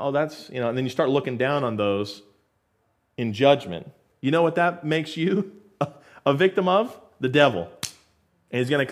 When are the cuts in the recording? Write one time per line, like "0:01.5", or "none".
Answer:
none